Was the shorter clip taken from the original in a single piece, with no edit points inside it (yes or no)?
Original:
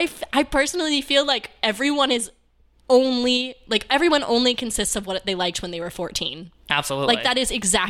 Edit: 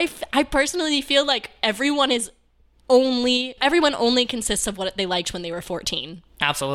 no